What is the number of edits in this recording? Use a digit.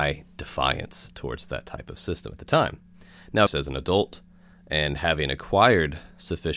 1